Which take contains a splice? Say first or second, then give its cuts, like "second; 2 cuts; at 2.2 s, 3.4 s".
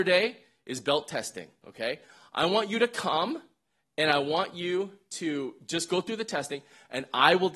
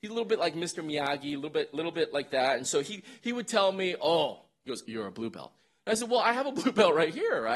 second; 1 cut; at 4.8 s